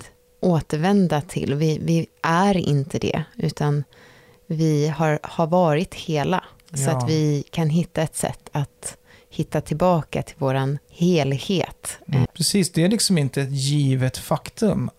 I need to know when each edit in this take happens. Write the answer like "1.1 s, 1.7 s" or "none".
10.8 s, 12.3 s